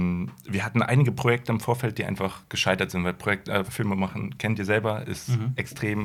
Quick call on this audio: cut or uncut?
cut